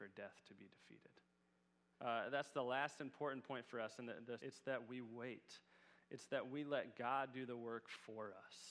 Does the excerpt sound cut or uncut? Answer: cut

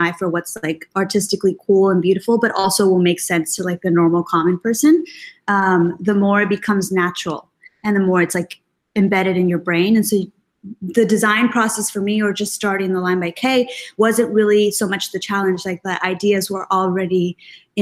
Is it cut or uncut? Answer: uncut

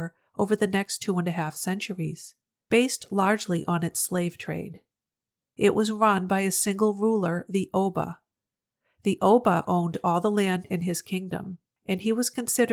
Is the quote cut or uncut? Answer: uncut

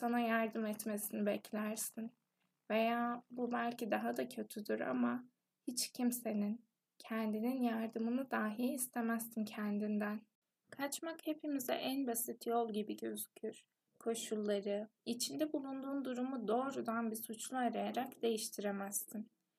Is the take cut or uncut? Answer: cut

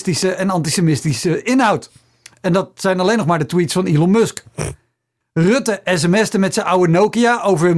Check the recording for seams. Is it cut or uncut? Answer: cut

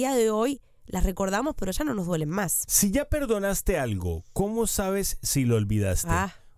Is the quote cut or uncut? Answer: uncut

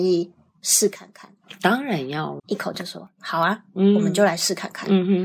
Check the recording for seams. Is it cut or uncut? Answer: cut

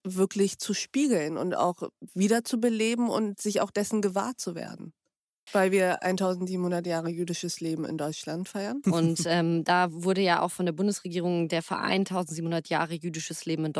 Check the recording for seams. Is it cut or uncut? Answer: cut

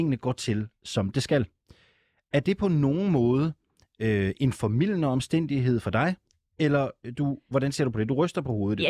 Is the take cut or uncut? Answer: uncut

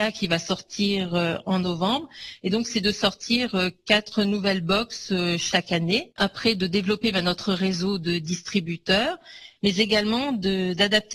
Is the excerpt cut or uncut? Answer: uncut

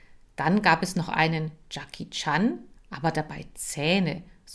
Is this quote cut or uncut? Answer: cut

